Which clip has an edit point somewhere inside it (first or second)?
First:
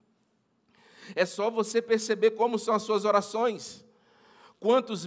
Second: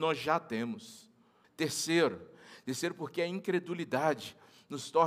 second